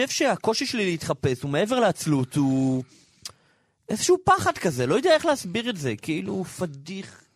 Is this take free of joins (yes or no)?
yes